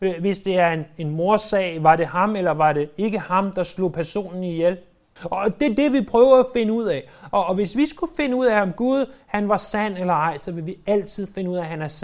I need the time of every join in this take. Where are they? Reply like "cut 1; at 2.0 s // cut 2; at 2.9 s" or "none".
cut 1; at 5.2 s